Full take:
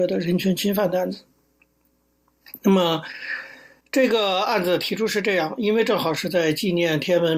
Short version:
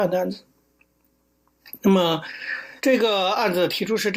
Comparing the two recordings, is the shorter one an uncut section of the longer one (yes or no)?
no